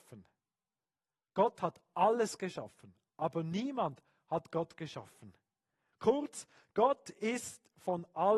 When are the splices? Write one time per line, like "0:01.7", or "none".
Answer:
0:05.9